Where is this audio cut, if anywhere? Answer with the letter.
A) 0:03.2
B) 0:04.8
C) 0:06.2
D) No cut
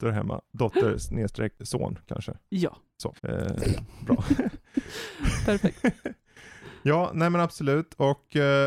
A